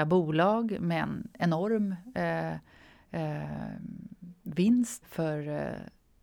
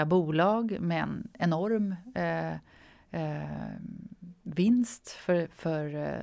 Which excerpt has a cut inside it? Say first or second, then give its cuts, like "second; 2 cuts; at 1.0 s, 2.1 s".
first; 1 cut; at 5.0 s